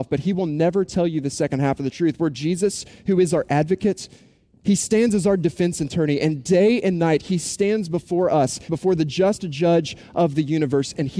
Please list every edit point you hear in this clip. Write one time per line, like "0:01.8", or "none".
0:08.7